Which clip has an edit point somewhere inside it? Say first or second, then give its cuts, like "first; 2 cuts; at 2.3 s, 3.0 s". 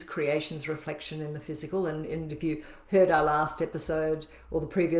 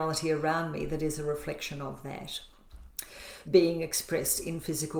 second; 1 cut; at 3.4 s